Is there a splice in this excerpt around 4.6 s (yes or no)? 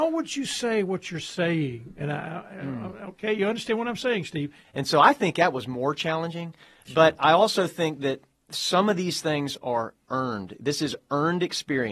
yes